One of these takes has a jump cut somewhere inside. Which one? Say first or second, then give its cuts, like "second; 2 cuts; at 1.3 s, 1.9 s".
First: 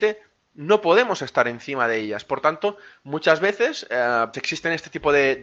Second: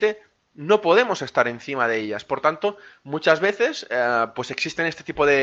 first; 1 cut; at 4.3 s